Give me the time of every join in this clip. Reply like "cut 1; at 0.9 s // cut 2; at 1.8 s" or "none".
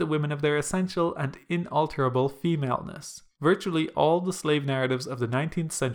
cut 1; at 3.3 s